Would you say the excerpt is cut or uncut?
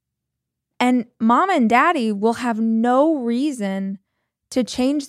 uncut